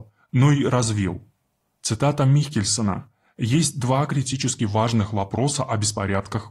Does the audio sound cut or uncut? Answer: uncut